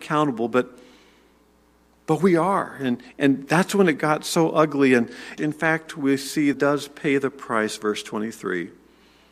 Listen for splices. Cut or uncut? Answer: cut